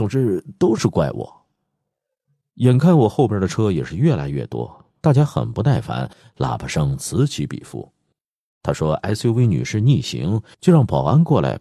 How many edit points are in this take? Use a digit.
2